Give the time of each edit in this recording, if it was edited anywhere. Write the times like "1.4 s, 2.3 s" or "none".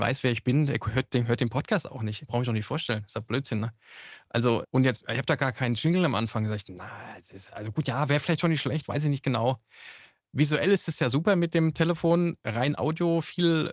4.6 s